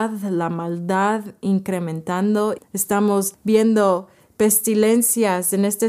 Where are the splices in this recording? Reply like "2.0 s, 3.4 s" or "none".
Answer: 2.6 s